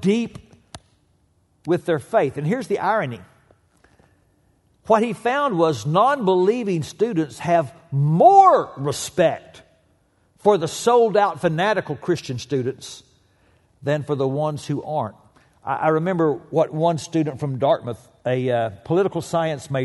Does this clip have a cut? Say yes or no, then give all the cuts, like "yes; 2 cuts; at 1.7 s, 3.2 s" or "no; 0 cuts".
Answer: no; 0 cuts